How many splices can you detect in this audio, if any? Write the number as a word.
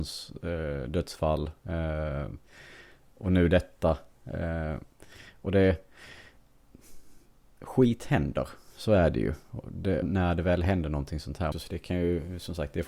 two